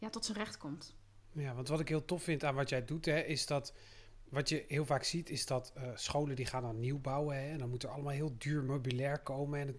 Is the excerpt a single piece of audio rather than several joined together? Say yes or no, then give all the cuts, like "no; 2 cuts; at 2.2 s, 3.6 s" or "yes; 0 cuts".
yes; 0 cuts